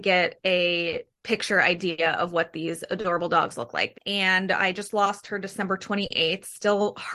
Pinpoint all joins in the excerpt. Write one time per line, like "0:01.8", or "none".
0:03.9

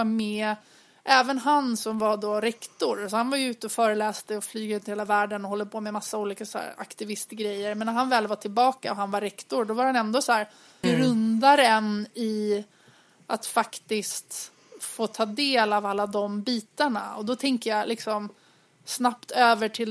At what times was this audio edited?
0:10.8

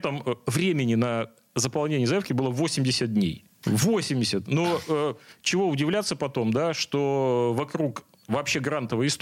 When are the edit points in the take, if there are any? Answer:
none

